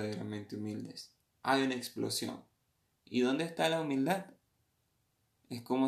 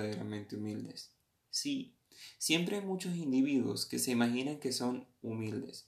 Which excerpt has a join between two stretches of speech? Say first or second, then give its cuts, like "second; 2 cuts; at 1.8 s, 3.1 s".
first; 1 cut; at 1.3 s